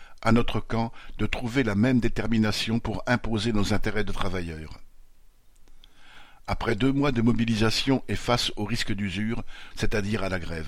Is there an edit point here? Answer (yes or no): yes